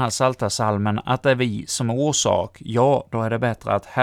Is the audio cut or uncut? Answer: uncut